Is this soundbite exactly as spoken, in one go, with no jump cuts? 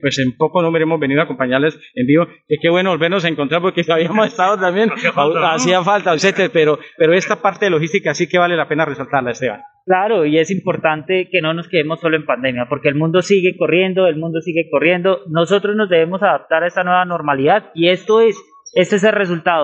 yes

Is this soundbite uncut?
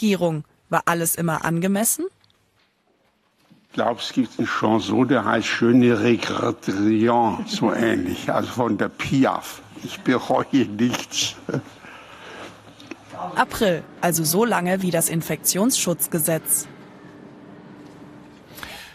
no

